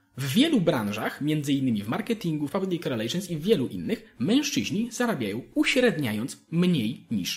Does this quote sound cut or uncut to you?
cut